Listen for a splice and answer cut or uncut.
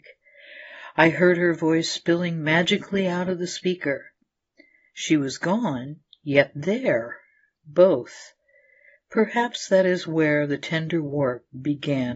uncut